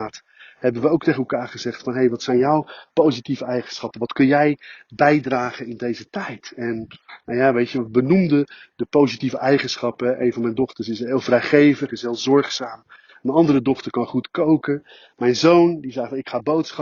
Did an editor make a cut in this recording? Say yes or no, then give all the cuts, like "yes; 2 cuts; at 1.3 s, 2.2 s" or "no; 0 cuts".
no; 0 cuts